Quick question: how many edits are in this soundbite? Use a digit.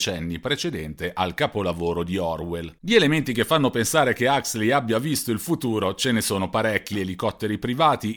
1